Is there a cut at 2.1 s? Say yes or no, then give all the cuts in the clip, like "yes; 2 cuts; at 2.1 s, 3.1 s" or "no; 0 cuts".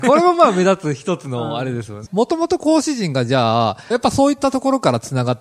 yes; 2 cuts; at 2.1 s, 3.9 s